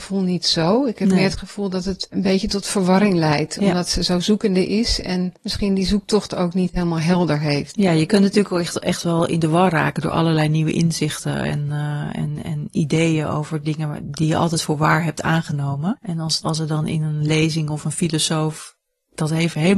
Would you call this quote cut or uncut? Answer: uncut